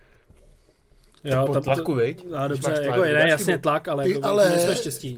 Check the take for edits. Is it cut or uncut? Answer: uncut